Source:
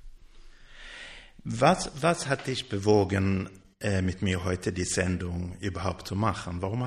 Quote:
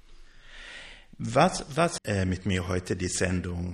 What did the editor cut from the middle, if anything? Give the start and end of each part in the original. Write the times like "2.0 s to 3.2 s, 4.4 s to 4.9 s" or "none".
2.2 s to 3.7 s